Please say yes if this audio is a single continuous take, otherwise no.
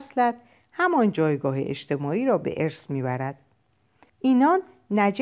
no